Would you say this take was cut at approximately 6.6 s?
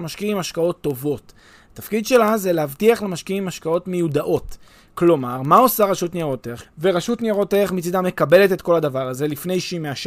yes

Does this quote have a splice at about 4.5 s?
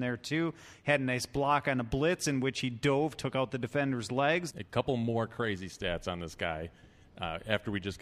yes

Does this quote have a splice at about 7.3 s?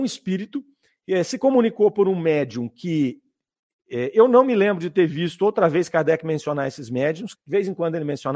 yes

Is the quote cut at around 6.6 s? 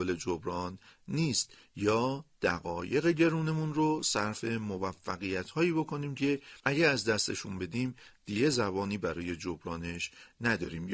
yes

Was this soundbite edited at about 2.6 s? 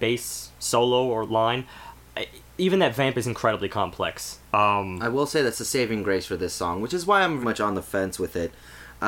no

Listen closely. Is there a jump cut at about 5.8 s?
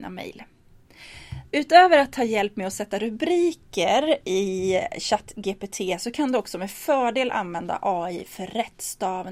no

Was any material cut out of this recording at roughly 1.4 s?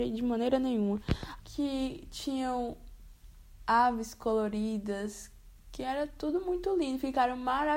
yes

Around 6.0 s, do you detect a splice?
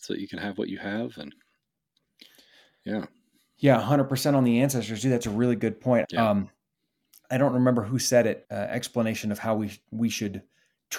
yes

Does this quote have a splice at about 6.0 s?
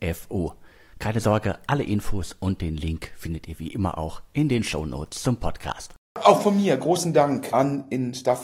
no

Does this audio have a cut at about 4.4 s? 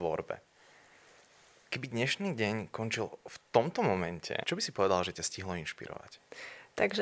yes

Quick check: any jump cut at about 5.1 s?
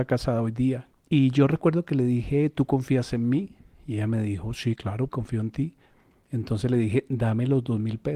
yes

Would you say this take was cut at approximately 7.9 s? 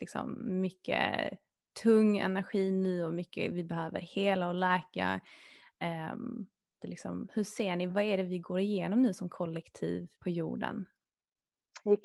yes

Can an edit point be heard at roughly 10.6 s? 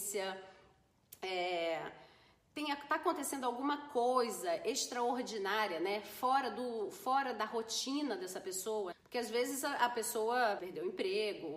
yes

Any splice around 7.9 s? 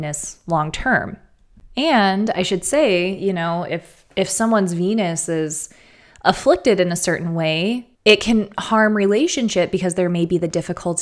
yes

